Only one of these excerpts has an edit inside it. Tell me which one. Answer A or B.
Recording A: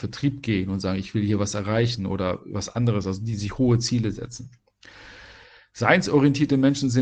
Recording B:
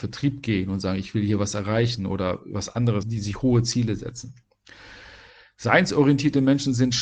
B